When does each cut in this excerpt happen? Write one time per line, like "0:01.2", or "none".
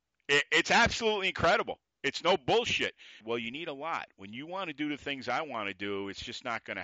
0:03.2